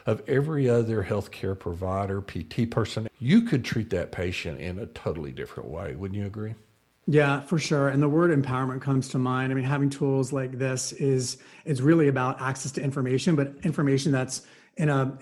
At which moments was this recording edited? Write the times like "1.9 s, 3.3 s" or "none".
3.1 s